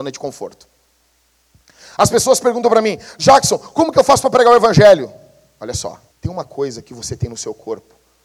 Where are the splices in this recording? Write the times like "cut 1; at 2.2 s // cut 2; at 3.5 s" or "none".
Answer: cut 1; at 6.1 s

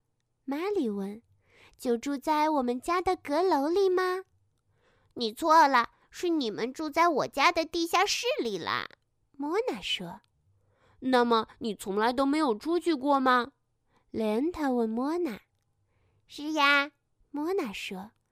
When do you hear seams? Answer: none

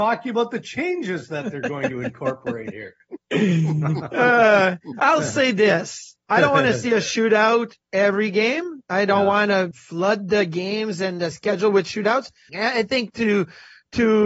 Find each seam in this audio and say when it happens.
cut 1; at 9.7 s // cut 2; at 12.5 s

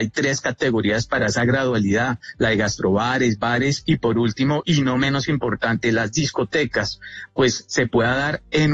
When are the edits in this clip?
none

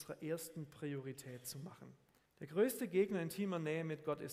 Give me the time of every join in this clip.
cut 1; at 2.3 s

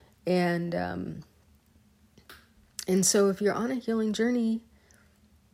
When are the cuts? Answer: none

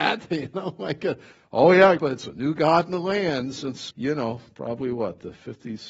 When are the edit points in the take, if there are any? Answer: cut 1; at 2.0 s // cut 2; at 3.9 s

